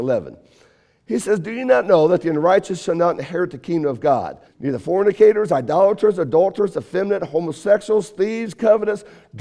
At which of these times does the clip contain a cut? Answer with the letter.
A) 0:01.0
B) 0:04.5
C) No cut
B